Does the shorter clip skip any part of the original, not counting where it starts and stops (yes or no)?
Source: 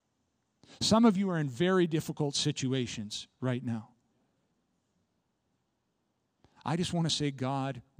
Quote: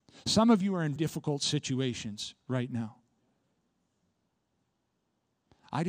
yes